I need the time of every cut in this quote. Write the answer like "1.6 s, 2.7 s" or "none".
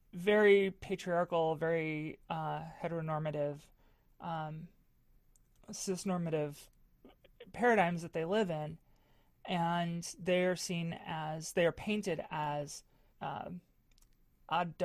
13.1 s